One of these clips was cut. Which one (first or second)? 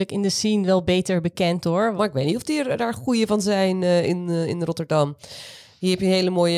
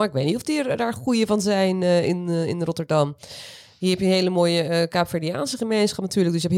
first